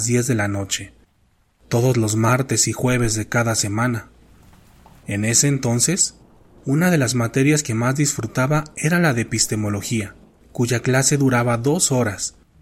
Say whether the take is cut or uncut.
cut